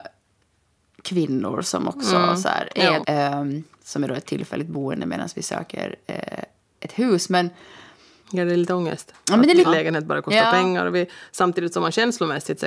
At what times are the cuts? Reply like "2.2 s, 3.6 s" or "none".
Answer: 3.0 s, 8.2 s, 9.6 s